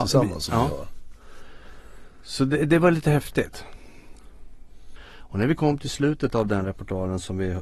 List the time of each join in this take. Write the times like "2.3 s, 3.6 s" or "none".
5.0 s